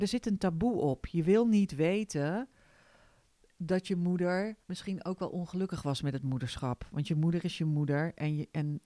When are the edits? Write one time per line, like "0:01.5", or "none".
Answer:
0:04.6